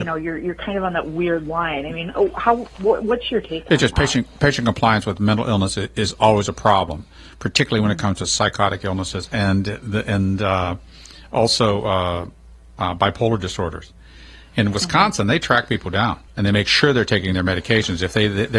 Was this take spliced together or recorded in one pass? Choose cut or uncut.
uncut